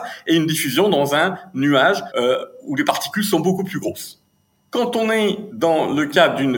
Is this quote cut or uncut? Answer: uncut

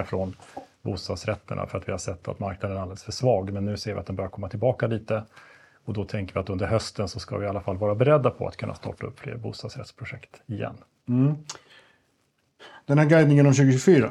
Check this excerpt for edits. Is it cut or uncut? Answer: uncut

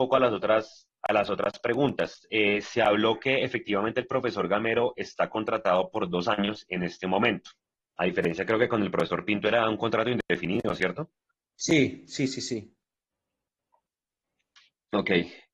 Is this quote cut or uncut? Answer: uncut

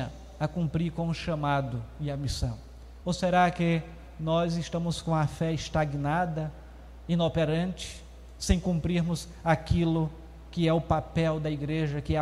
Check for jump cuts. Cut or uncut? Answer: cut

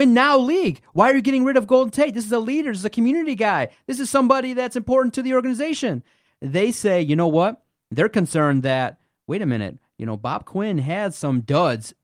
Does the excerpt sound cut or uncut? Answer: uncut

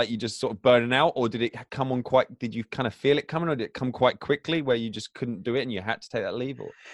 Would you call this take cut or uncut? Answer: uncut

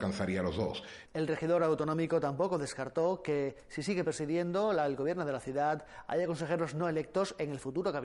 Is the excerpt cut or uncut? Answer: cut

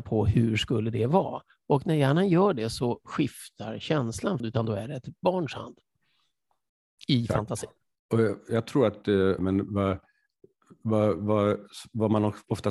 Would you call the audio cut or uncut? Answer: cut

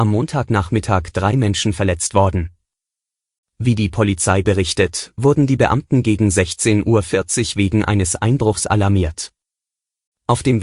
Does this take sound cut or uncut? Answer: uncut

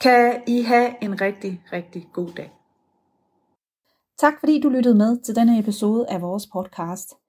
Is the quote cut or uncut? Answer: uncut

